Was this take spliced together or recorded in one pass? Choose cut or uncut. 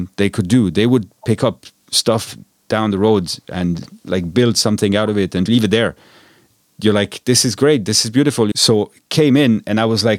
cut